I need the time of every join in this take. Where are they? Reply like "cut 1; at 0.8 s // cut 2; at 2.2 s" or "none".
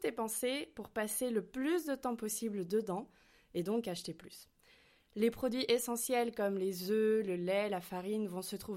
none